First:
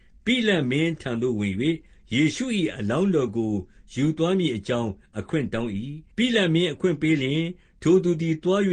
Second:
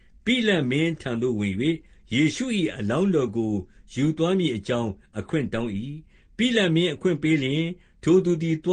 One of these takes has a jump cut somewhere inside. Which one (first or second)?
first